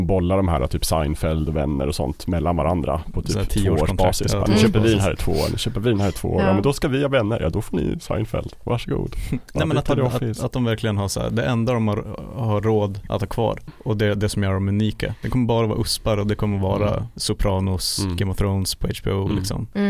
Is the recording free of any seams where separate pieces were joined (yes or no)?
yes